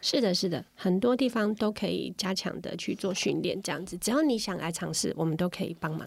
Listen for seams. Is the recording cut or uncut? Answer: uncut